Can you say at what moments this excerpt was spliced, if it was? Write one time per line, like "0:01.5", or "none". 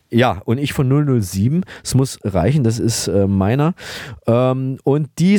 none